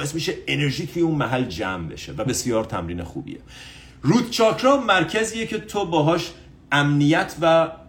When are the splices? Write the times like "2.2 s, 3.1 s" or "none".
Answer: 2.3 s